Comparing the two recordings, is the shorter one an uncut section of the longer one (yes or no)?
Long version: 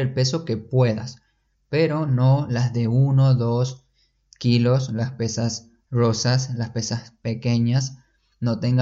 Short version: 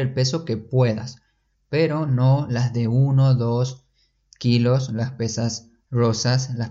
yes